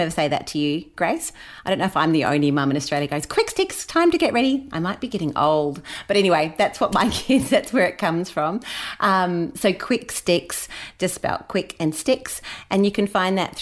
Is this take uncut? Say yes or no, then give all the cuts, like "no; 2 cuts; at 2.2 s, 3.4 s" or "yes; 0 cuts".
yes; 0 cuts